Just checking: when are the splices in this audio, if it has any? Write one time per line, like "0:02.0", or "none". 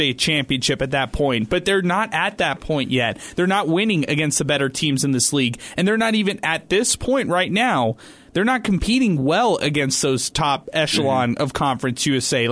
none